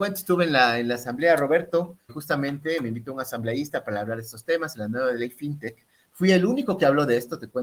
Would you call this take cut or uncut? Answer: cut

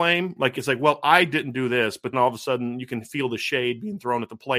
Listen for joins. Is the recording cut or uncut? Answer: cut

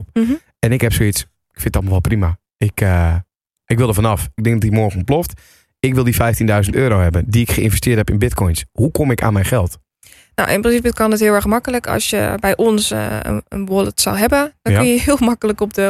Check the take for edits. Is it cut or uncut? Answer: cut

